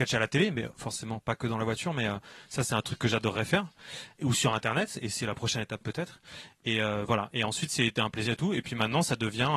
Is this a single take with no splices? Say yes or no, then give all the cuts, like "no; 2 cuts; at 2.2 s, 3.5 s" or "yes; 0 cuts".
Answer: yes; 0 cuts